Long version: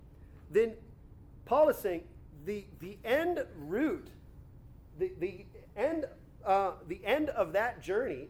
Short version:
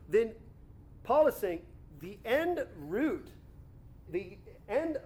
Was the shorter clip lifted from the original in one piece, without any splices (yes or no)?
no